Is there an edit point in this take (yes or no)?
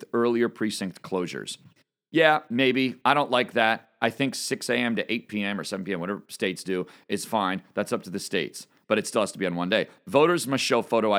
no